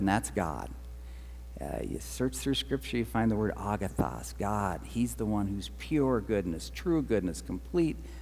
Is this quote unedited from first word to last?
yes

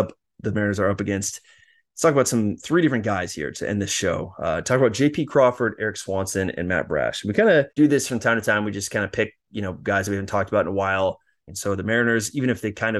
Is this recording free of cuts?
no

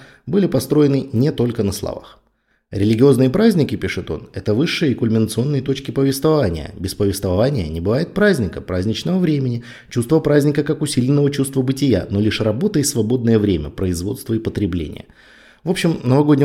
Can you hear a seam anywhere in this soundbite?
no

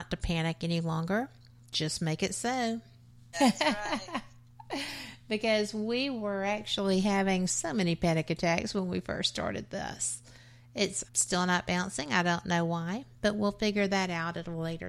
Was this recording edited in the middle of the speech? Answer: yes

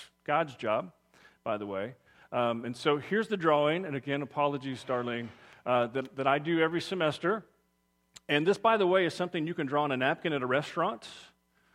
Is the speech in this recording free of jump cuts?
yes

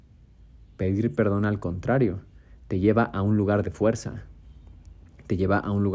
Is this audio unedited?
yes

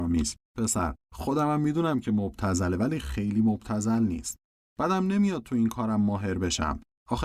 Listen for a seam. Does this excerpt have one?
no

